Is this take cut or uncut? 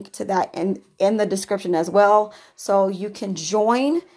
uncut